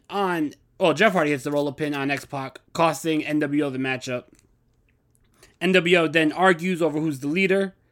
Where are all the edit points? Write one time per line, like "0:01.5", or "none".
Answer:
0:02.7